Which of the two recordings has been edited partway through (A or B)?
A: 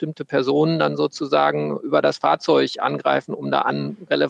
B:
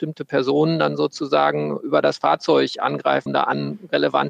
B